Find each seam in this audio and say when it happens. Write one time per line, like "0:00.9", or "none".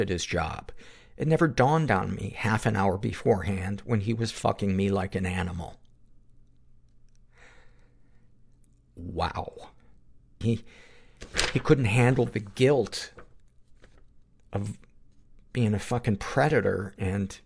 0:10.4